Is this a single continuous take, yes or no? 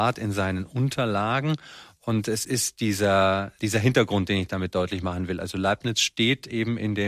yes